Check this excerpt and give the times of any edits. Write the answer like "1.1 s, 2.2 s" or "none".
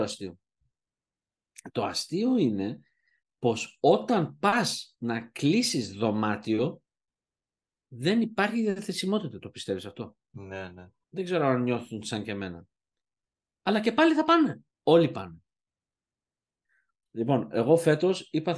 11.0 s, 14.7 s